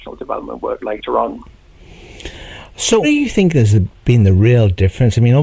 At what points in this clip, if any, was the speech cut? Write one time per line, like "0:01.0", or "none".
0:03.0